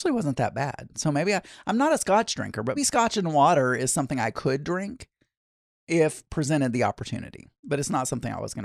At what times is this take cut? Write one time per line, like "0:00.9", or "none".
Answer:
0:02.8